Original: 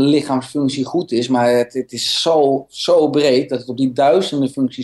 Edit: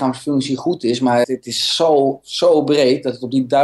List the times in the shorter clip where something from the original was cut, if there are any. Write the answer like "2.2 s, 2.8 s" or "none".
1.2 s

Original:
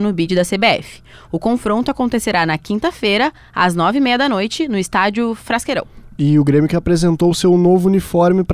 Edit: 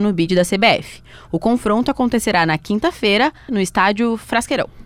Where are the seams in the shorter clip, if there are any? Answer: 3.5 s

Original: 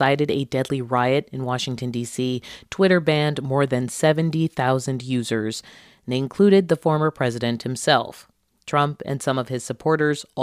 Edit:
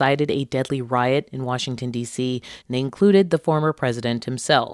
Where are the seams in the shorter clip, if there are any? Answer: 2.6 s

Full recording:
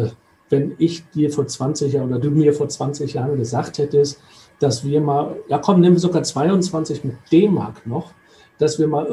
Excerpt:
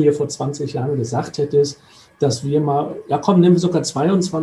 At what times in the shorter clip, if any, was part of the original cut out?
none

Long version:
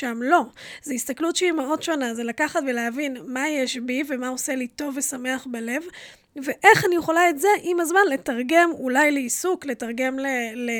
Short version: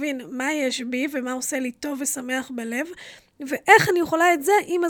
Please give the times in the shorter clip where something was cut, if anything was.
none

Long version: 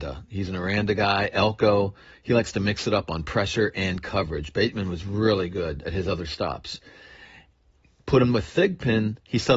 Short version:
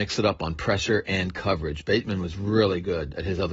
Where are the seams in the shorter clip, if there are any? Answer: none

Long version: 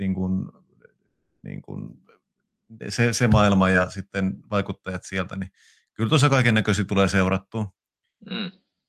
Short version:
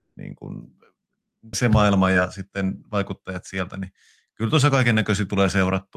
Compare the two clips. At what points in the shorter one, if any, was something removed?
1.5 s

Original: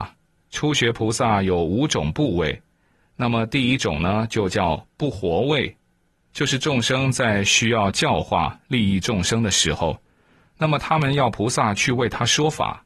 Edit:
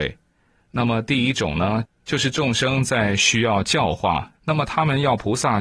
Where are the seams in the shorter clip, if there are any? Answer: 1.9 s, 4.4 s

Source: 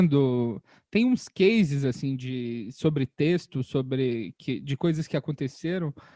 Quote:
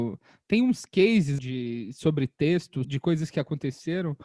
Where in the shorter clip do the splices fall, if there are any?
1.4 s, 2.8 s

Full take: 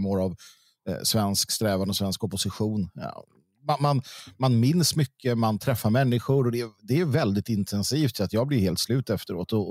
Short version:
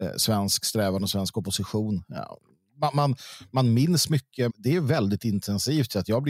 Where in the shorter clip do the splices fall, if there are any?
4.5 s

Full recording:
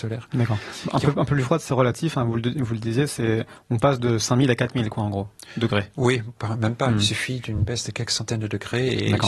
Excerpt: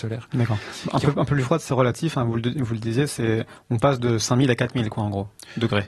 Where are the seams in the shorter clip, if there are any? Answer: none

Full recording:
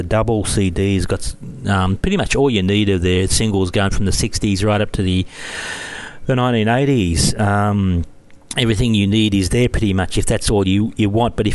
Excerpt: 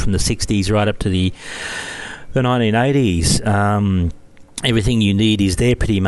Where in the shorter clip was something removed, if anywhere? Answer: none

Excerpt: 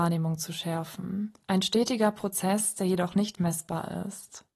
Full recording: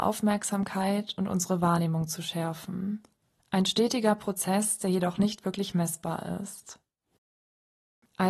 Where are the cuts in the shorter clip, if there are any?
1.4 s, 3.4 s

